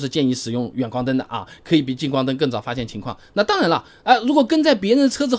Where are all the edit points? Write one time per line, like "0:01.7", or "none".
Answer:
none